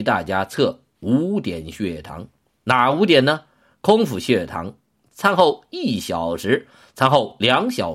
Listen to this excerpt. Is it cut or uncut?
cut